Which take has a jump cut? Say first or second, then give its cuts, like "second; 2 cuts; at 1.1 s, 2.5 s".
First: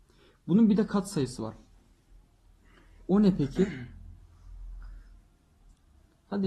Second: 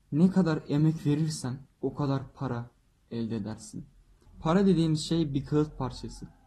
second; 2 cuts; at 1.7 s, 4.2 s